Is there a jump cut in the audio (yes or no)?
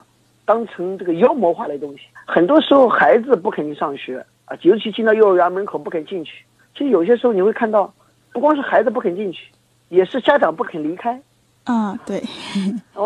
yes